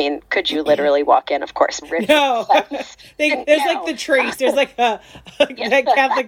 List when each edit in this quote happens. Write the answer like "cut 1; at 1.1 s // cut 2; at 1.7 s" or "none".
cut 1; at 1.8 s